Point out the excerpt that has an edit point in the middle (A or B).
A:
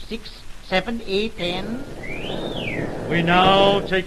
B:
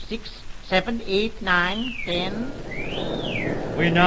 A